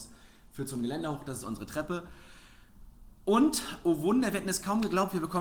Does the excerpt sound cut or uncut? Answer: uncut